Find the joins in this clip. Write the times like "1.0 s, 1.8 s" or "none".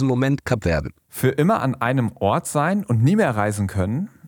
1.0 s